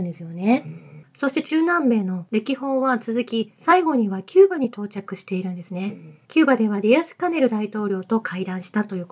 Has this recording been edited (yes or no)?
yes